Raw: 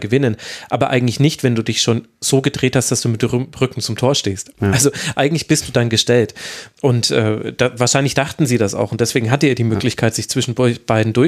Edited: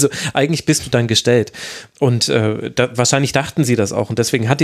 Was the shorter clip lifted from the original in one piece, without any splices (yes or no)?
yes